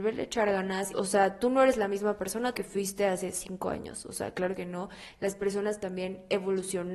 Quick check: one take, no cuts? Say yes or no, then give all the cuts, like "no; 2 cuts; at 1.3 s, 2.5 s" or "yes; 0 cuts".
no; 2 cuts; at 0.9 s, 2.5 s